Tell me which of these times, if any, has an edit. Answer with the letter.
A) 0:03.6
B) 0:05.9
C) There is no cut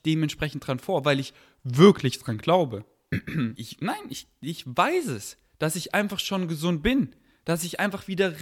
A